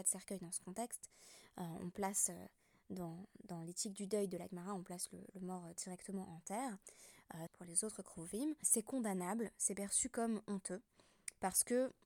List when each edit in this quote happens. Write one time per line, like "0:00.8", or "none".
0:07.5
0:08.6